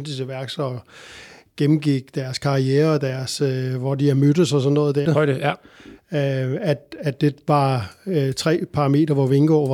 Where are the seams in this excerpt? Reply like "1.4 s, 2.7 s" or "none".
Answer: 5.1 s